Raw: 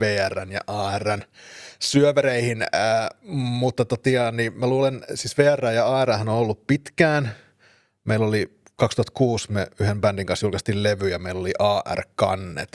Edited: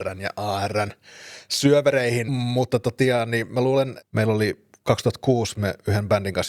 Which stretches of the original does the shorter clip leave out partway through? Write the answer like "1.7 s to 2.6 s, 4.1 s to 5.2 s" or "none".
2.6 s to 3.3 s, 5.1 s to 7.9 s